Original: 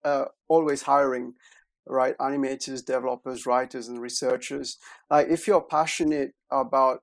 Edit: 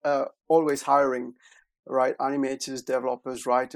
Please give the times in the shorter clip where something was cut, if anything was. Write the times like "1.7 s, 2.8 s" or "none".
none